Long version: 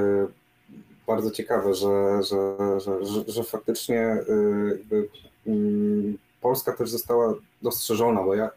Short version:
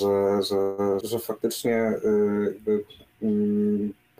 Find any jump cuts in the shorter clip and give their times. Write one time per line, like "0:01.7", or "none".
0:01.0